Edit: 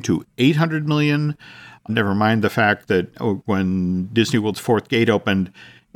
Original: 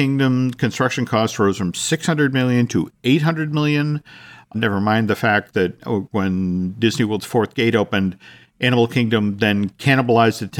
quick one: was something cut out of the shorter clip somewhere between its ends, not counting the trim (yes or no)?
no